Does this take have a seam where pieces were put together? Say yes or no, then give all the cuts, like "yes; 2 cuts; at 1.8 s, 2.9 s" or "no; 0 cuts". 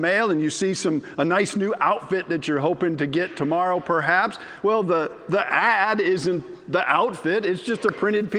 no; 0 cuts